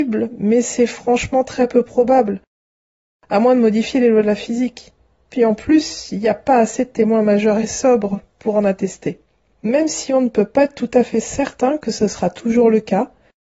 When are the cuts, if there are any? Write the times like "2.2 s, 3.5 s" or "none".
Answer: 9.5 s